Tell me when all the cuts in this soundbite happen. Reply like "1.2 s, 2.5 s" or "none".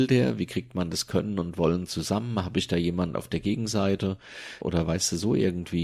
4.6 s